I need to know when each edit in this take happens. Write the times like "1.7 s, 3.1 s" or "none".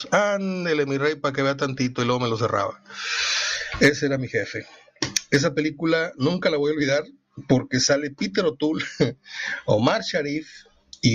none